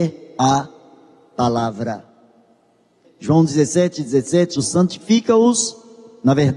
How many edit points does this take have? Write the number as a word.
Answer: two